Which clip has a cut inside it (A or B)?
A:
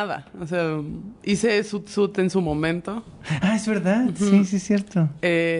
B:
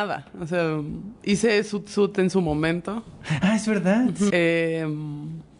B